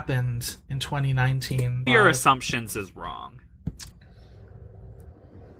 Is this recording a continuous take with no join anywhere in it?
no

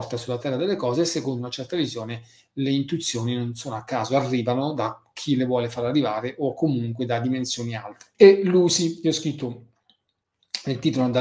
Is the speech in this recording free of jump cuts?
no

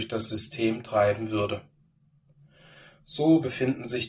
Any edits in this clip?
no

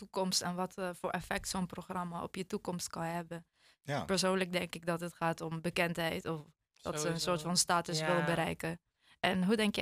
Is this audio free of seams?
yes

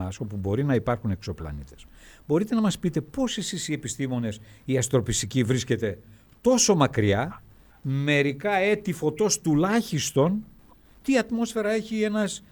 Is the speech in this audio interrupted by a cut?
no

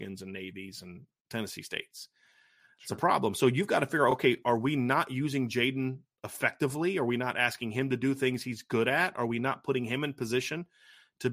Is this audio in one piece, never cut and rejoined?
yes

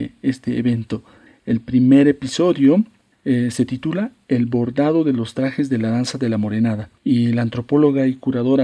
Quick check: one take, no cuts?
no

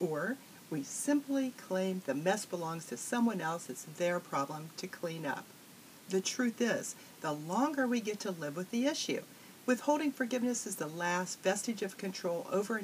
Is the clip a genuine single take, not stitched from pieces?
no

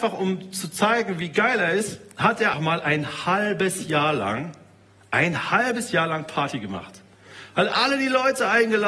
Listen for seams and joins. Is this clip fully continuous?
no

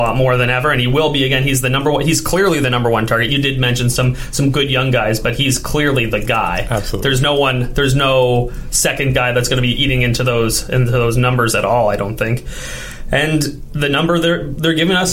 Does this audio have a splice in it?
no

